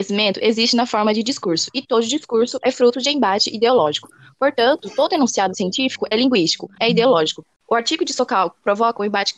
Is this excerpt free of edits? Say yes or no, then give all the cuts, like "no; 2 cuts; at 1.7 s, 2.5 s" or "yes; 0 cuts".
no; 1 cut; at 6.8 s